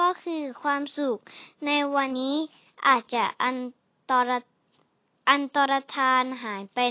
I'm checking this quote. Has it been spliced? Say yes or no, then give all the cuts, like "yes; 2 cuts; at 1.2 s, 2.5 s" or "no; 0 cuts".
yes; 1 cut; at 2.1 s